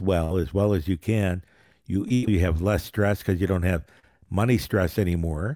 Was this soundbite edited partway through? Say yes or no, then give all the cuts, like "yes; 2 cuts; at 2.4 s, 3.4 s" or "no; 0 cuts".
yes; 1 cut; at 2.3 s